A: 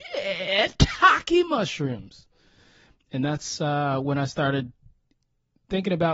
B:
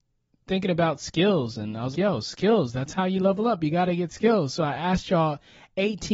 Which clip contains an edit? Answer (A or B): B